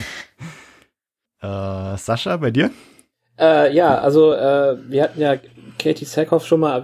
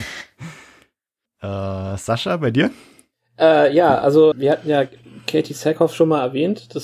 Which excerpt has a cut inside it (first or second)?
second